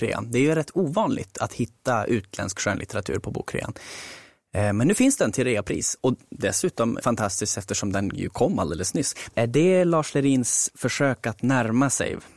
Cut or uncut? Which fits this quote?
cut